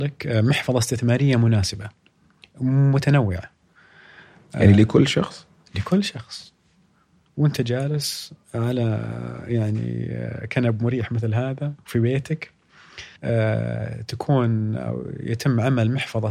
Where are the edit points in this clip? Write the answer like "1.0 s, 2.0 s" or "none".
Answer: 8.4 s, 13.2 s